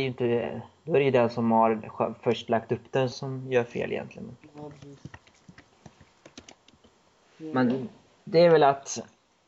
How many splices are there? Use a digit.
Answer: 1